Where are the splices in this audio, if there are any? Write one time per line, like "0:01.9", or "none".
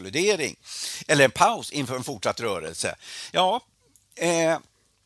none

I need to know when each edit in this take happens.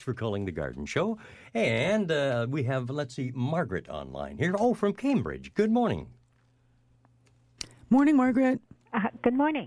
none

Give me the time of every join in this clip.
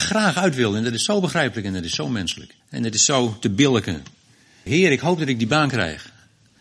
0:02.6
0:04.7

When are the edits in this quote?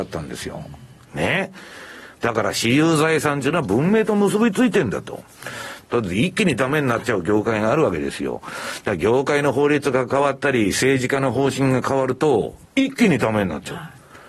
0:02.1
0:05.8
0:12.6

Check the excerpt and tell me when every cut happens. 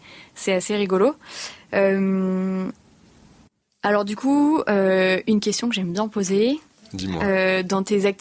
none

